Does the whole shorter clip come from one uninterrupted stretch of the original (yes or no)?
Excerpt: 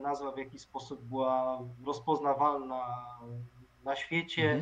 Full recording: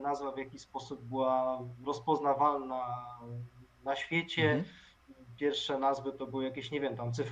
yes